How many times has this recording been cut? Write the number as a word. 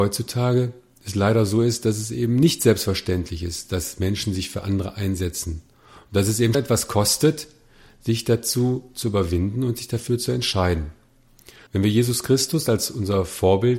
two